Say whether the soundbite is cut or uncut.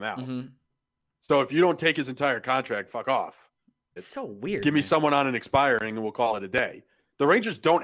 cut